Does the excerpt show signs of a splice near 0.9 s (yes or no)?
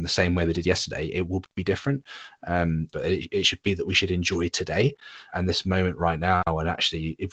no